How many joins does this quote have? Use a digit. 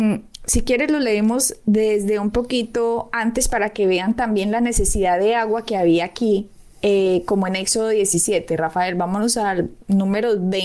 0